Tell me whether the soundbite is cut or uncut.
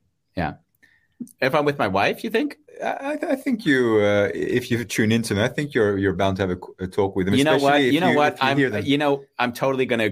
uncut